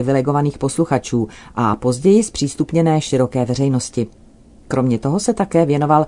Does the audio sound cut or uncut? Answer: uncut